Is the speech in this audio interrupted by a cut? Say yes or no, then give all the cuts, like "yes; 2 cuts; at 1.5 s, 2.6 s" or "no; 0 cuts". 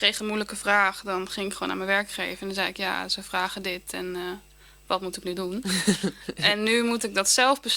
no; 0 cuts